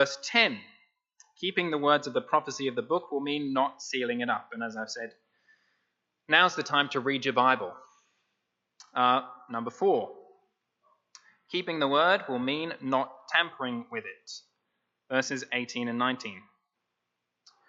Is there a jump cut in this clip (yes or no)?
no